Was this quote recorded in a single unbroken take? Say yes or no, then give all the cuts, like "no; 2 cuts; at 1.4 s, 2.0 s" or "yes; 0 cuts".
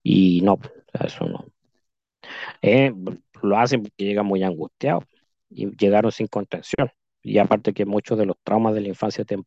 yes; 0 cuts